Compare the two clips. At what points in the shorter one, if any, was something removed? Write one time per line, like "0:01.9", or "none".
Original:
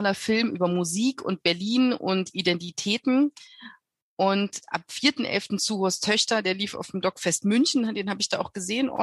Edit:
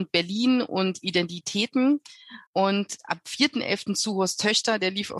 0:02.5